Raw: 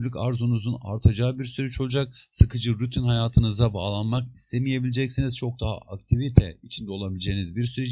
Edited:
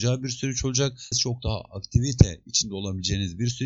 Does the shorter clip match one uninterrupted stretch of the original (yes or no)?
no